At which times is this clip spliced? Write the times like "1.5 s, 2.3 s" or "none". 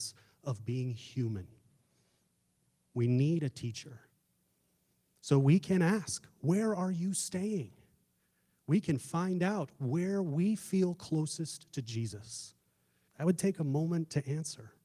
13.1 s